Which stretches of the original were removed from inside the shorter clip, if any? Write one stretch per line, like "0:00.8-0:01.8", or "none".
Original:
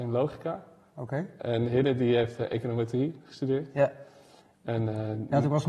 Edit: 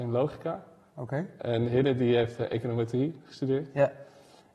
none